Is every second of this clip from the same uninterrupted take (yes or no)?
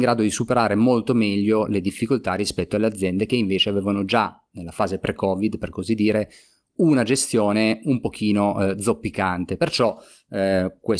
yes